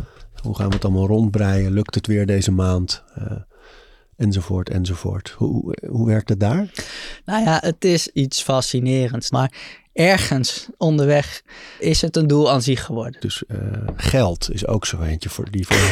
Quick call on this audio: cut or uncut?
cut